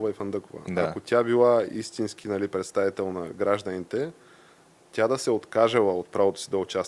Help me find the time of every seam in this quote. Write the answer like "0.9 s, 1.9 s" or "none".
none